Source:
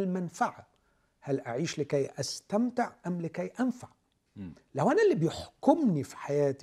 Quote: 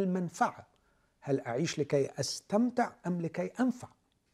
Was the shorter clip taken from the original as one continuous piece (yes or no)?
yes